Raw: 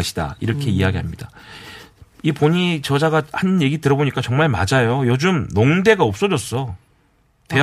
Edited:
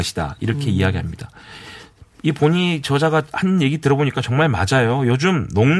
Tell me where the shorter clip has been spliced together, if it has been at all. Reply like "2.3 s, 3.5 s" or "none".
none